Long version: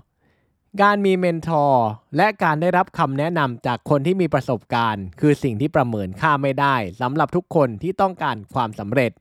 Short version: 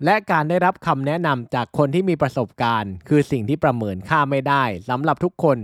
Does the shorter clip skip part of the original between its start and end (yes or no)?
no